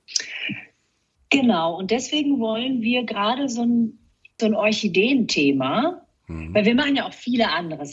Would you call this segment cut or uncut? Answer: cut